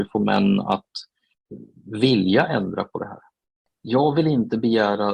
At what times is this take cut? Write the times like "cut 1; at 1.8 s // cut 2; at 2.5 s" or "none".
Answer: none

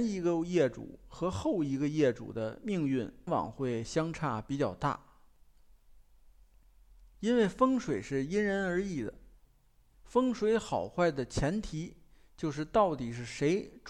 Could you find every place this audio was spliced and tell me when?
cut 1; at 3.3 s

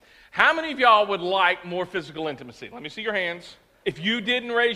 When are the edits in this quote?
cut 1; at 3.8 s

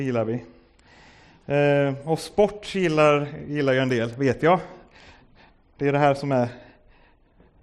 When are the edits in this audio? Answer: none

